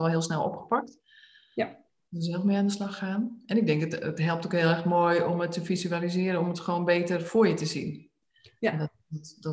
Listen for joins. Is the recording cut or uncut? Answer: uncut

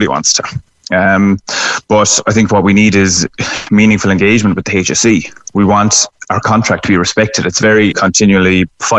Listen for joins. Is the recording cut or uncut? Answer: cut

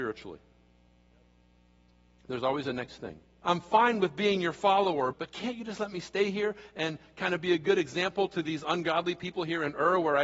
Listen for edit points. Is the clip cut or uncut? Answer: cut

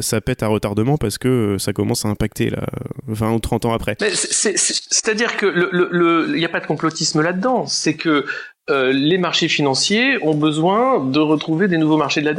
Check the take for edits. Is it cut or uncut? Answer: uncut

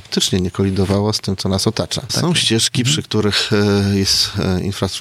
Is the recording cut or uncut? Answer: cut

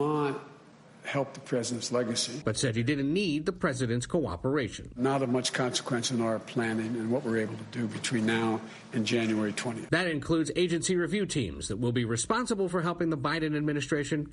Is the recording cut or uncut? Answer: uncut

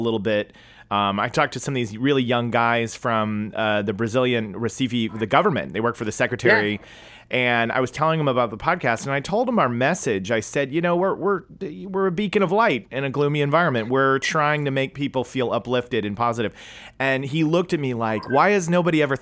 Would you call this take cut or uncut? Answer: uncut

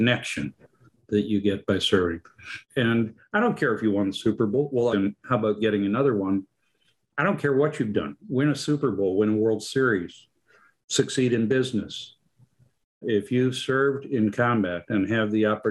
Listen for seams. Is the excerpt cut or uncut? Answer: cut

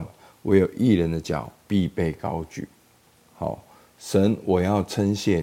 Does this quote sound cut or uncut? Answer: cut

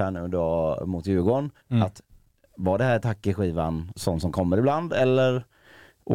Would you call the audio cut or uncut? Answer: cut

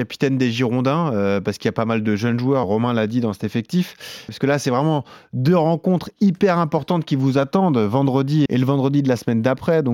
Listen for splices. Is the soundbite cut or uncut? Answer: cut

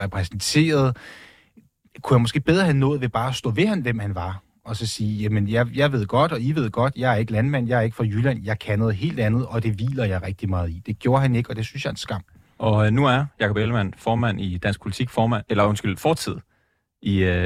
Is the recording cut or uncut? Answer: uncut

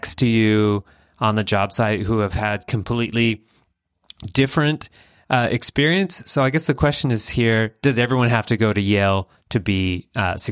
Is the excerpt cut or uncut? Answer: uncut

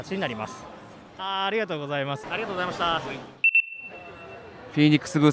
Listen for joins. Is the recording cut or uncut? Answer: cut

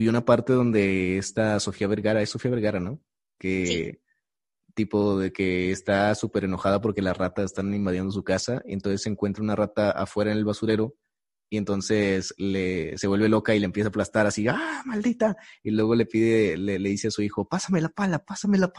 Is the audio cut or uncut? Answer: uncut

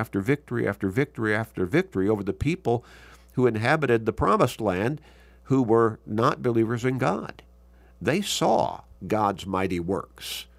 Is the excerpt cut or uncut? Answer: uncut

